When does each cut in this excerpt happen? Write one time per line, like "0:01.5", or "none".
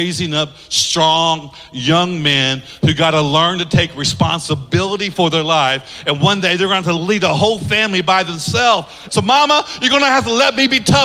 0:09.1